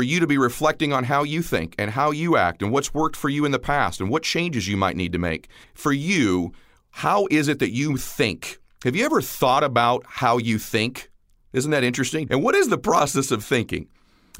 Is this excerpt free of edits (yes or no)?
no